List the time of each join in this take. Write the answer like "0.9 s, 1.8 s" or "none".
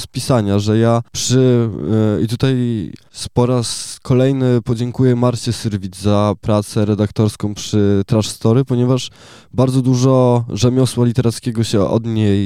none